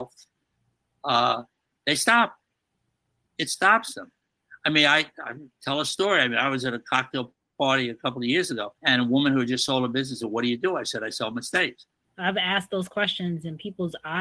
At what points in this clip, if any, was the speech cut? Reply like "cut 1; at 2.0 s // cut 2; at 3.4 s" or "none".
cut 1; at 8.8 s // cut 2; at 12.0 s